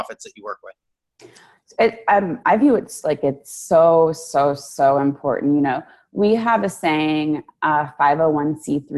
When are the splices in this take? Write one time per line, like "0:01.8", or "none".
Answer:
none